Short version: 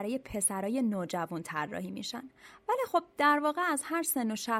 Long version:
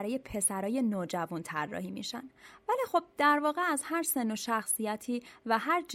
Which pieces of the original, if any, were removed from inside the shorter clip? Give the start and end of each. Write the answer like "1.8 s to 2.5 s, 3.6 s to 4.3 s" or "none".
none